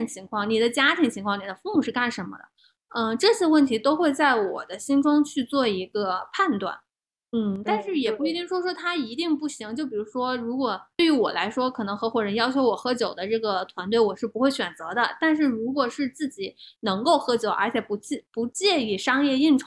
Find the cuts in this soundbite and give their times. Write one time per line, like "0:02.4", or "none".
none